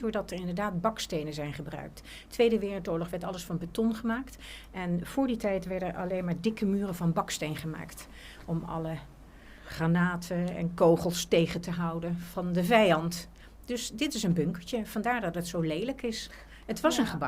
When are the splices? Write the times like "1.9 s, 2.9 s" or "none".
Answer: none